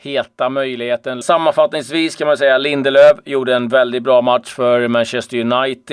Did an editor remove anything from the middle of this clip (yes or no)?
yes